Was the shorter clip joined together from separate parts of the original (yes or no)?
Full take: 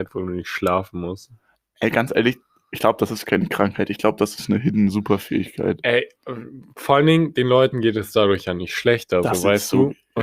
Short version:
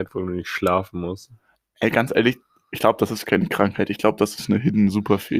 no